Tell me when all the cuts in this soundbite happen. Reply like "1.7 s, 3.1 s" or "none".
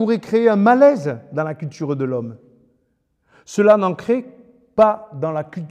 none